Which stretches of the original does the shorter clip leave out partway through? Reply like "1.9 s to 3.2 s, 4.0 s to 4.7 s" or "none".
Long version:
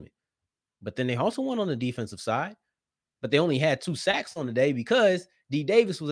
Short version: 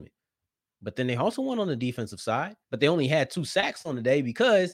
2.6 s to 3.1 s